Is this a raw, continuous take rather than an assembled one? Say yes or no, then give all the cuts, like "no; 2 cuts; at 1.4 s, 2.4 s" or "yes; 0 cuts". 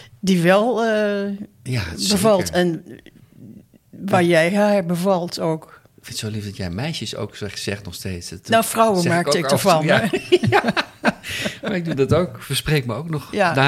yes; 0 cuts